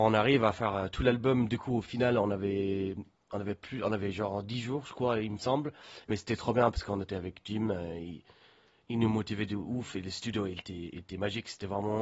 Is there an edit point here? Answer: yes; 1 cut; at 6.0 s

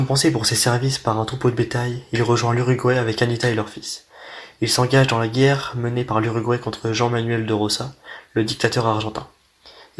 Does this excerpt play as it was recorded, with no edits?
yes; 0 cuts

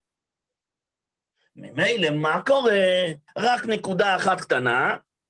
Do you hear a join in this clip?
yes; 1 cut; at 3.3 s

